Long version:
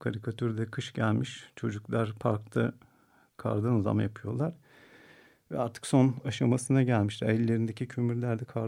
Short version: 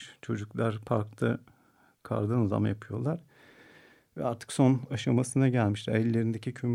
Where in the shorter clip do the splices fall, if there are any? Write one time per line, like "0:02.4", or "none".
none

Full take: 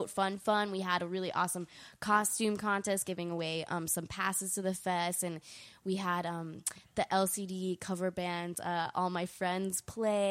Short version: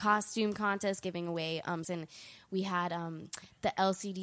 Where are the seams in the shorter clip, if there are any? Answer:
0:01.8

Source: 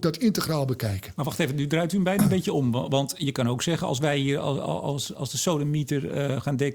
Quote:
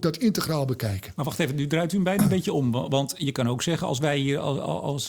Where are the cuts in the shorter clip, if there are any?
none

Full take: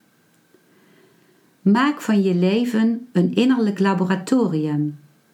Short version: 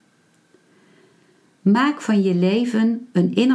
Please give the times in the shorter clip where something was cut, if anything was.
none

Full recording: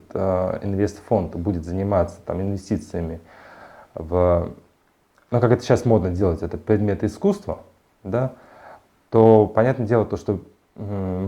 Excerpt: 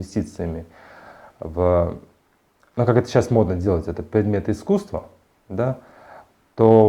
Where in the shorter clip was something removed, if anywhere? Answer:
none

